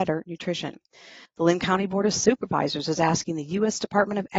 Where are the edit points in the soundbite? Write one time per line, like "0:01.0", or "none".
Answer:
0:01.3